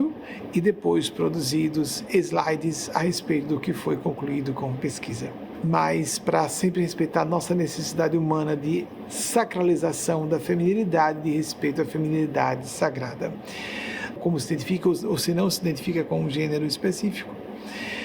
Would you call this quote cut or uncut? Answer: cut